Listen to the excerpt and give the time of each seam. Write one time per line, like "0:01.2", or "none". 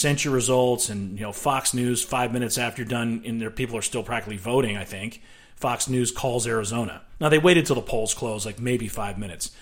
none